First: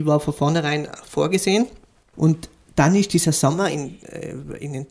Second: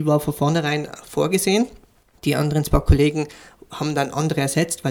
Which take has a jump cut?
first; 1 cut; at 2.1 s

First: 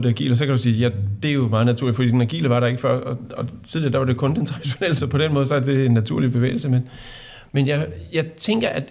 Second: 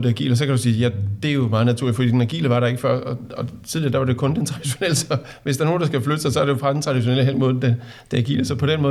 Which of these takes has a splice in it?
first; 1 cut; at 5.0 s

